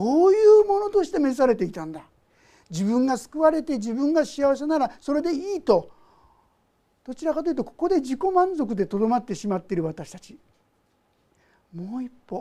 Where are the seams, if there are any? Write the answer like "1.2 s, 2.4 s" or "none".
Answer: none